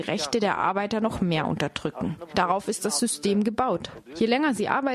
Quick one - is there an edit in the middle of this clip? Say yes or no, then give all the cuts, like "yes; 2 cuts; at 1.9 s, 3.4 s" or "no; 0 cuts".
no; 0 cuts